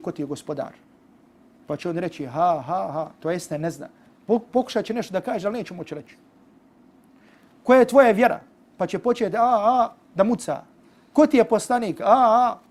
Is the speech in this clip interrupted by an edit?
no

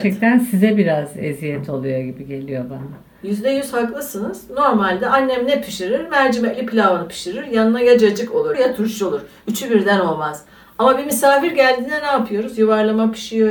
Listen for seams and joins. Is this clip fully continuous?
no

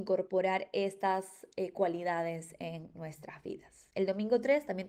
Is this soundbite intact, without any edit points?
yes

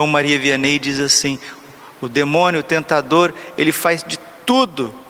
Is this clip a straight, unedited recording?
yes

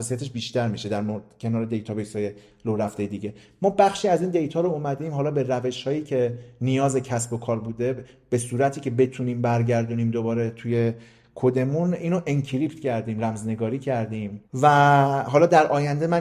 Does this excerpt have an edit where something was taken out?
yes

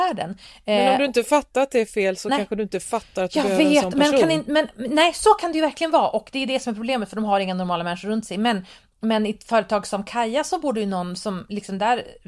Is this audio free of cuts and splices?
yes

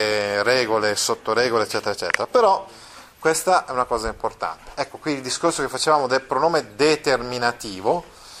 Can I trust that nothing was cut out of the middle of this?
yes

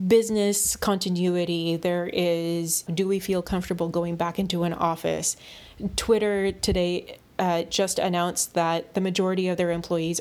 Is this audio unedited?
no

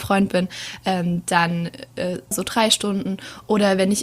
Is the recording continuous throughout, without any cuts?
no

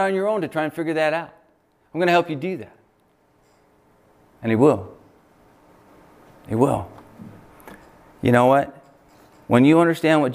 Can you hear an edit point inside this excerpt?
no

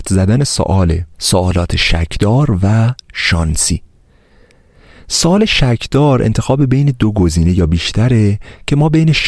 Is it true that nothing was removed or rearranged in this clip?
no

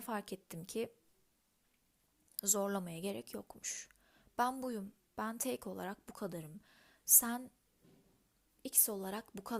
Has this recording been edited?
no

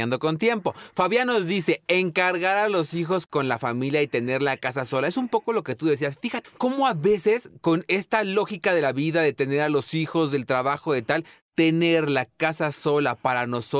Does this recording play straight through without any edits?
no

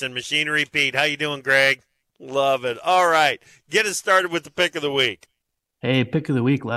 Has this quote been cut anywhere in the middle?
yes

